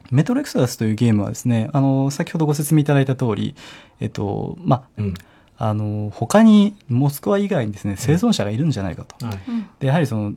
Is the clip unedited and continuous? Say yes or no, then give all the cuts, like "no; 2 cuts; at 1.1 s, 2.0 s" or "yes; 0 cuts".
no; 1 cut; at 5.0 s